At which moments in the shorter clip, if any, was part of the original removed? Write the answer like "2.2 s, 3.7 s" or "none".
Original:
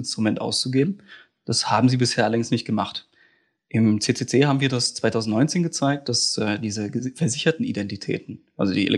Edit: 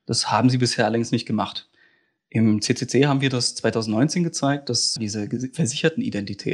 5.0 s